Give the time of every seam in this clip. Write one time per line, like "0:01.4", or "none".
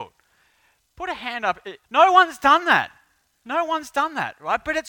0:01.8